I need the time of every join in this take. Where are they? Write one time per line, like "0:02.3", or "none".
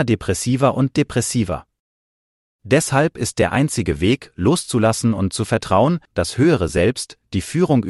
0:06.0